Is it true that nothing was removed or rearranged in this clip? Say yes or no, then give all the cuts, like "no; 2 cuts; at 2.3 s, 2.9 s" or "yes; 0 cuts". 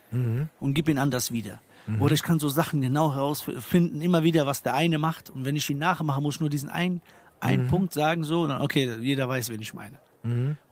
yes; 0 cuts